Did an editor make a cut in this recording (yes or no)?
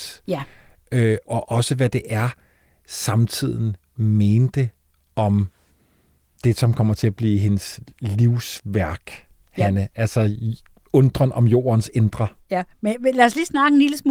yes